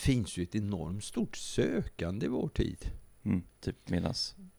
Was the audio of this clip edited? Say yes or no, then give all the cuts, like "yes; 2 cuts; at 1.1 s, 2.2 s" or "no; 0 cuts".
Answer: yes; 1 cut; at 3.5 s